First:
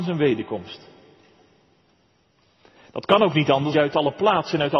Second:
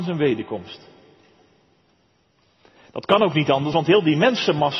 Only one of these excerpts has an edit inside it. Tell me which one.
first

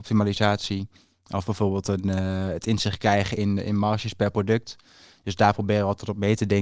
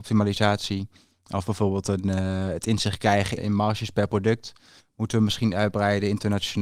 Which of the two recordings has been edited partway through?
second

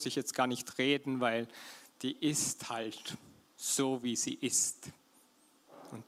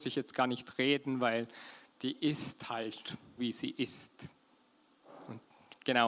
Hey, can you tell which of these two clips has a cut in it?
second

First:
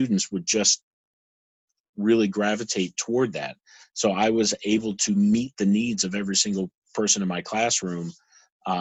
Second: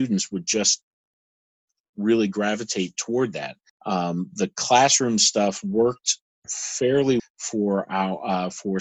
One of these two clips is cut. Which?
second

